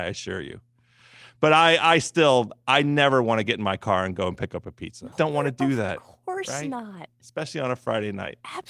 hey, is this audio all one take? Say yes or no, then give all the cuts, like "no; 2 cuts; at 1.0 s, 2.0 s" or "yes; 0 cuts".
no; 1 cut; at 5.1 s